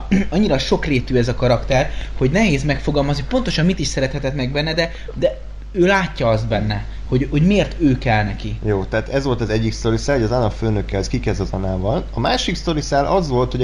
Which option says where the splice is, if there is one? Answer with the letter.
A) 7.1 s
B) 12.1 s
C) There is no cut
C